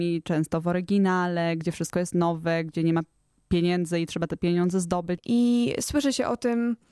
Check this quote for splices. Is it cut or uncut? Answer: cut